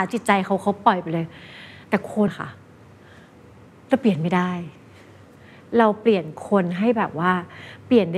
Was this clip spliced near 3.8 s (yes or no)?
no